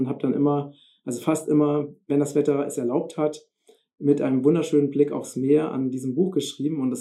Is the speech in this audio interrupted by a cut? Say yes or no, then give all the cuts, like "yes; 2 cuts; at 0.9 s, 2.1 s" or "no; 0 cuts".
no; 0 cuts